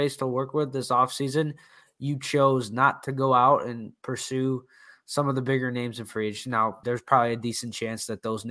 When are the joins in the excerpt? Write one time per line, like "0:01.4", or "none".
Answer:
0:06.8